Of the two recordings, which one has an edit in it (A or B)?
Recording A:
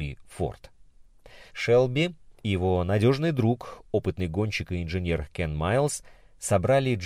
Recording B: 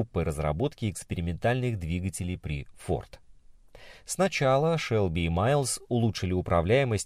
A